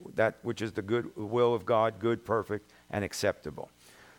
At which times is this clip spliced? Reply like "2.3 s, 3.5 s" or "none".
none